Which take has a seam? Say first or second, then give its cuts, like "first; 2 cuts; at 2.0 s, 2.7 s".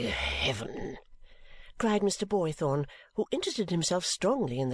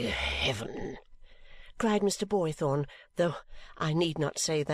second; 1 cut; at 3.0 s